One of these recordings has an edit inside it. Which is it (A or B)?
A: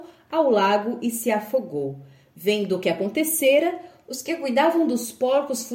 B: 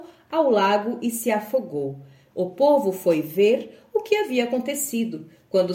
B